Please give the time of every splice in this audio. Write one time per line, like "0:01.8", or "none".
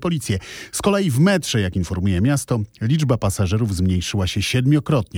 none

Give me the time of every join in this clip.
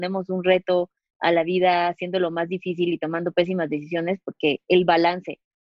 0:04.2

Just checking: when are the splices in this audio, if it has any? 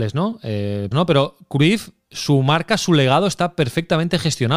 0:00.9

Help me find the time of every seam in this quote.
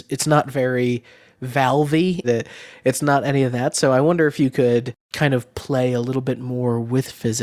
0:02.2

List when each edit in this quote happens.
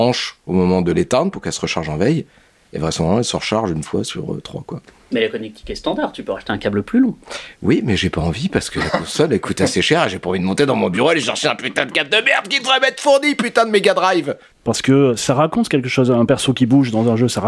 0:14.5

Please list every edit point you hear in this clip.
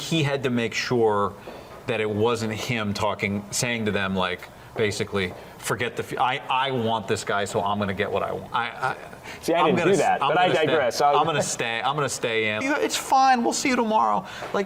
0:08.5
0:12.6

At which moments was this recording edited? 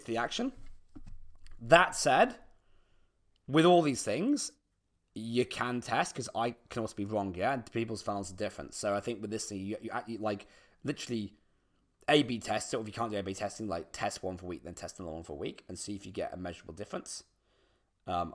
0:13.9

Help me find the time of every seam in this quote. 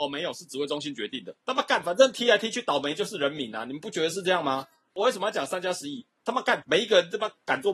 0:06.6

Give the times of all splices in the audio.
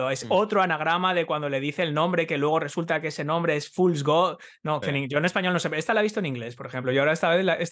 0:04.8

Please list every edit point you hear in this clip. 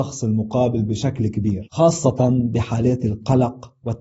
none

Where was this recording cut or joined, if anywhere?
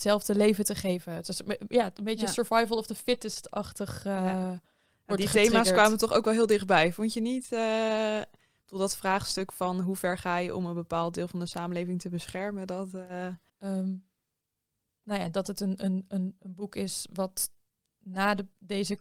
0:13.5

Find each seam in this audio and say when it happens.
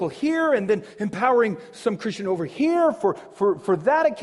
none

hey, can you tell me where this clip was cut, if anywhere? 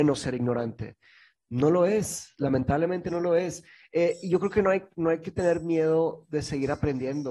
none

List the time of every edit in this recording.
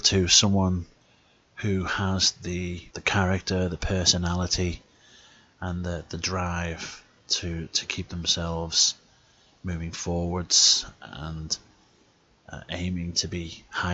0:02.9

